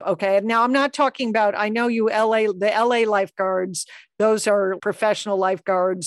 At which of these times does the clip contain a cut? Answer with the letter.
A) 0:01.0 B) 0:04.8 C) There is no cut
B